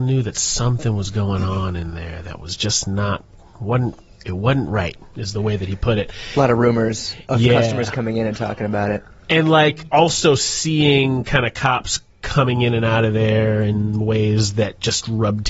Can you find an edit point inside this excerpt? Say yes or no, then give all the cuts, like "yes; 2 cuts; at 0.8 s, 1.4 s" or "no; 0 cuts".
no; 0 cuts